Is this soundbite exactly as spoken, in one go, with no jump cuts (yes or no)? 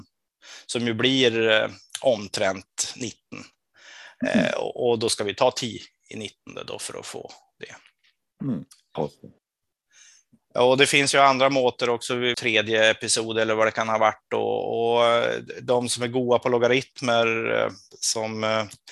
no